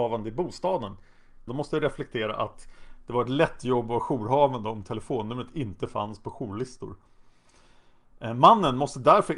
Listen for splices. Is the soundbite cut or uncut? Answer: cut